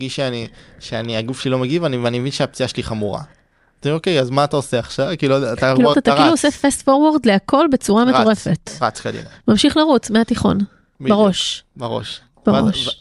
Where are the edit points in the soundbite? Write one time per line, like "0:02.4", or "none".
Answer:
0:05.9